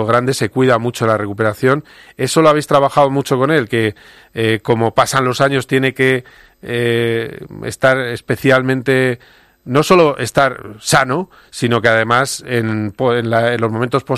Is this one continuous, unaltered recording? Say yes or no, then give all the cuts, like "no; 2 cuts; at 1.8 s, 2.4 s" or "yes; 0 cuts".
yes; 0 cuts